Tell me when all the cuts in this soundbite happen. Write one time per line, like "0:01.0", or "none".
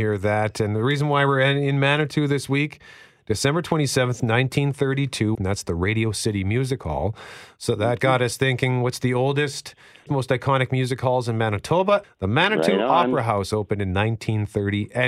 0:05.3
0:10.1
0:12.0